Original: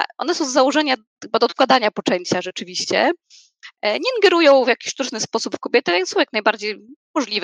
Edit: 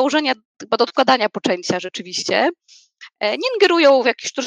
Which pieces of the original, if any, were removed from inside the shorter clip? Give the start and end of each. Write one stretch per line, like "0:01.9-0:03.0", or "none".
none